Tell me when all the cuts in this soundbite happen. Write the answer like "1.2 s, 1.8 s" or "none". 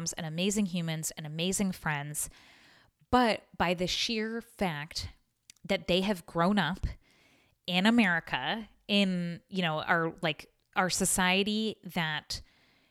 none